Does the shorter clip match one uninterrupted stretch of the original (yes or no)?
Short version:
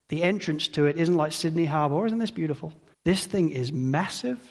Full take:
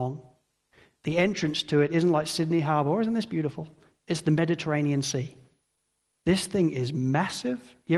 no